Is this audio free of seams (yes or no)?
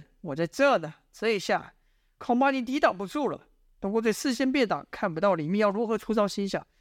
yes